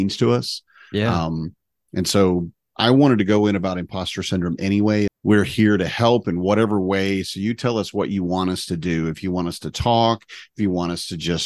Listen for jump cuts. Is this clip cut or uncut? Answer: cut